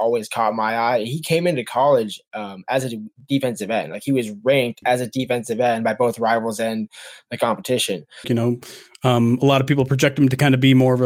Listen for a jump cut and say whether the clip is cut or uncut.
cut